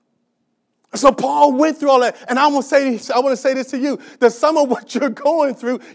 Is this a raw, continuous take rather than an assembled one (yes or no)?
yes